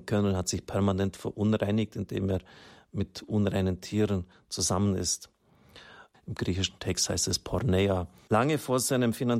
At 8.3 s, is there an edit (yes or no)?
yes